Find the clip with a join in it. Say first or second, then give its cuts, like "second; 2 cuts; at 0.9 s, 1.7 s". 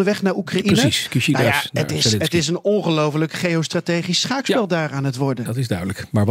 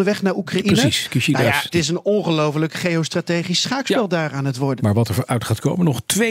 second; 2 cuts; at 1.7 s, 4.8 s